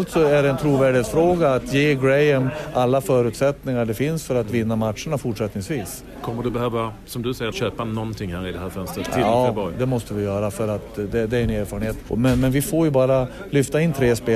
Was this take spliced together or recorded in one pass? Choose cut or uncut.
cut